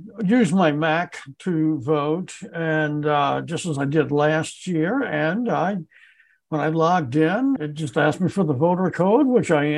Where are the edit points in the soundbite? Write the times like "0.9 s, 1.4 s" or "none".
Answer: 7.6 s